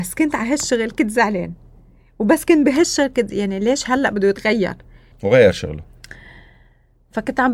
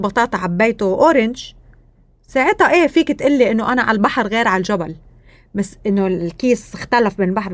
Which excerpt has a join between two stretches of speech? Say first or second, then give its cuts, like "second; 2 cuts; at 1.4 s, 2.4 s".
first; 1 cut; at 5.1 s